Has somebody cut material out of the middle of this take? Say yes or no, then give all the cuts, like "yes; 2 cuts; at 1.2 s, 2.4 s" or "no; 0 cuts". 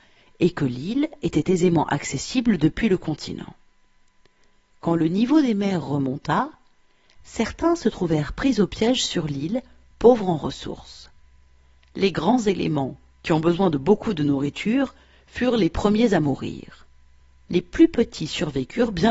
no; 0 cuts